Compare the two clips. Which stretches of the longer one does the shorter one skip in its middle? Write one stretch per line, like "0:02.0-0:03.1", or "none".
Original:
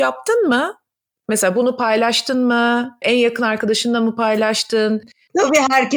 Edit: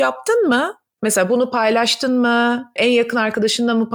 0:00.9-0:01.2